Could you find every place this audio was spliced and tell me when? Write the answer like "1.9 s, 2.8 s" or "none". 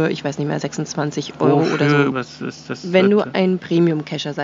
2.1 s